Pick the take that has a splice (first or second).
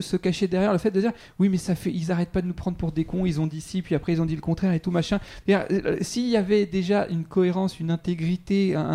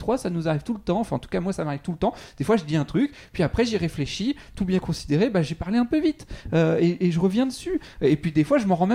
first